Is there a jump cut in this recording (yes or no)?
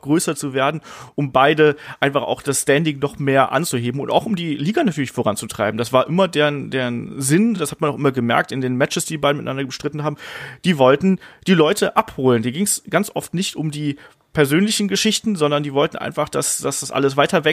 no